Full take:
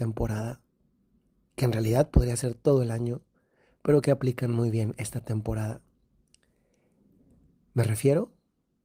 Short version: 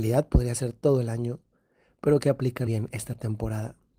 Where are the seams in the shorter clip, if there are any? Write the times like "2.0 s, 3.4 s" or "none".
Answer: 2.7 s